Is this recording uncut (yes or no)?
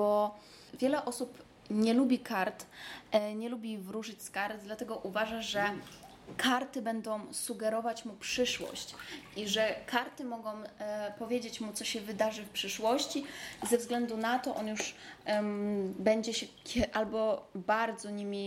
yes